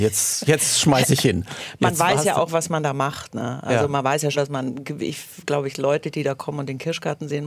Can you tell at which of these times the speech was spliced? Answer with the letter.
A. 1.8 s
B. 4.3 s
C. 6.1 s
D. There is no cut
B